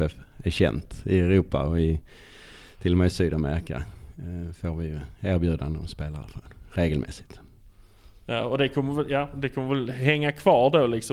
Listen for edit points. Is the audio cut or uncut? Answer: uncut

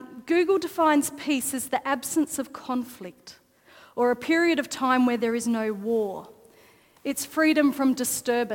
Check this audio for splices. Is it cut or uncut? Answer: uncut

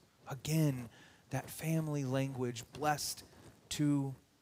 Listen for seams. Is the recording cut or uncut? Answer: cut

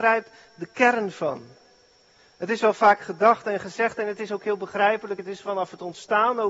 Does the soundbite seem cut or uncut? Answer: uncut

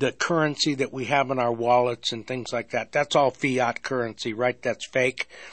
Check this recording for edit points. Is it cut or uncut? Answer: uncut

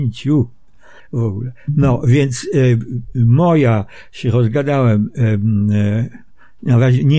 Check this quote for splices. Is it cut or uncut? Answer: uncut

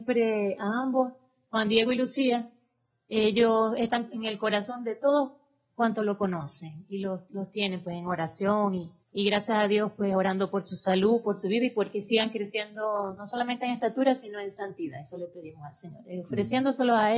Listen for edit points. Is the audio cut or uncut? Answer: cut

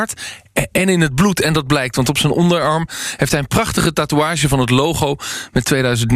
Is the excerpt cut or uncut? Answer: uncut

